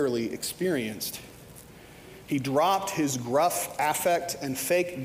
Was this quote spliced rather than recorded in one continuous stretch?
yes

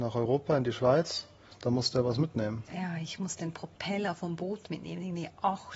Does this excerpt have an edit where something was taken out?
no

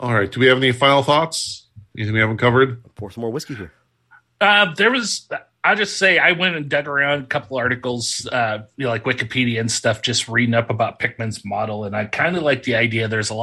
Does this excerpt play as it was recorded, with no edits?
yes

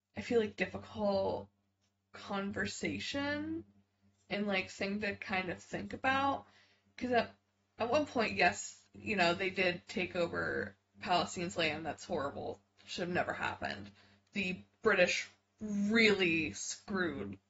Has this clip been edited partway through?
no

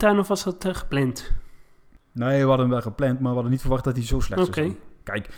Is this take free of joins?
yes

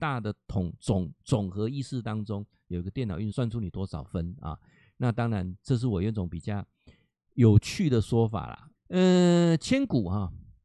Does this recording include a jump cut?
yes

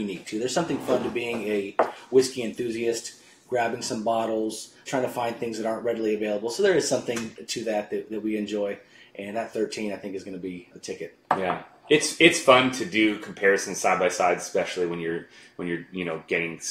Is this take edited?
yes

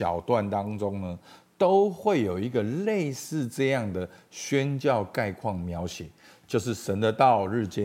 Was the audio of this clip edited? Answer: no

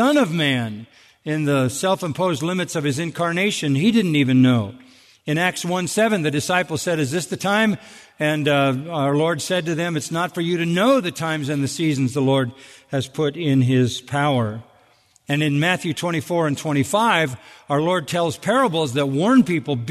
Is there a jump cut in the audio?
no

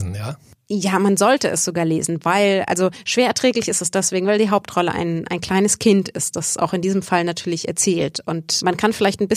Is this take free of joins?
yes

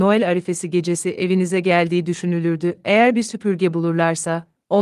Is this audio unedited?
yes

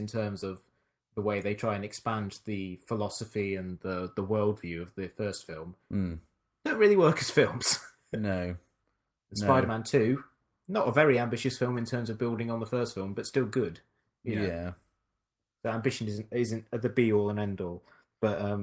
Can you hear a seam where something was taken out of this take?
no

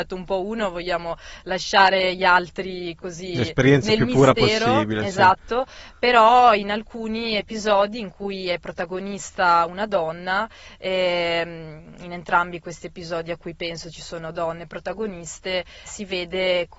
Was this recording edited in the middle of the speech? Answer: yes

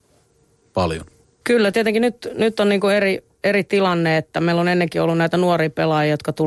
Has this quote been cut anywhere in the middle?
yes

